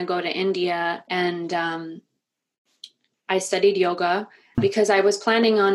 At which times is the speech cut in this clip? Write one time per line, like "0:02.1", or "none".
0:01.1
0:04.6